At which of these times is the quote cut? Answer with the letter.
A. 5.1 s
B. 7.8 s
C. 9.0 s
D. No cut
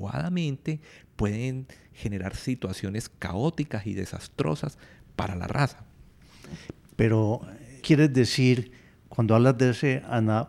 B